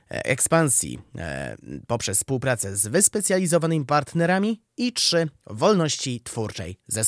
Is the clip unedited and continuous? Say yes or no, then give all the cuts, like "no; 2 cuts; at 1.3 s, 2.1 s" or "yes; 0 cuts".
yes; 0 cuts